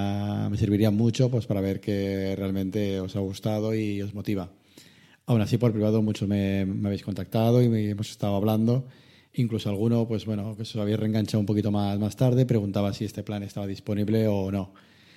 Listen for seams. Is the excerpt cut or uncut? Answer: cut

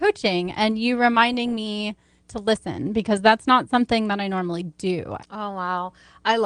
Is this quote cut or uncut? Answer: cut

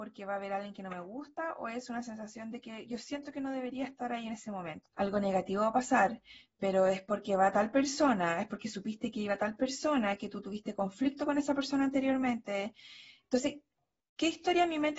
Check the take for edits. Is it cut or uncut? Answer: cut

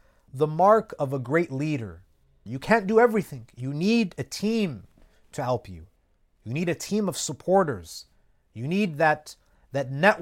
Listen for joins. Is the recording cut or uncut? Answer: cut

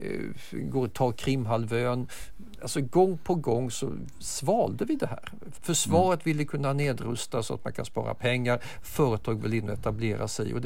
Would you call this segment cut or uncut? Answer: cut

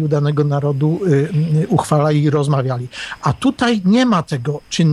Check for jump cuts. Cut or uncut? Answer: uncut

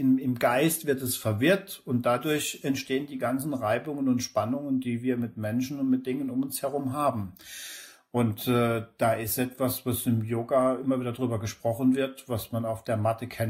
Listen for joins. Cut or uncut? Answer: uncut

